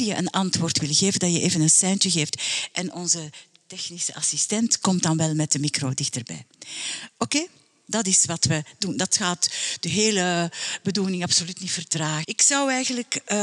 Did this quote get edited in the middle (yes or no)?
yes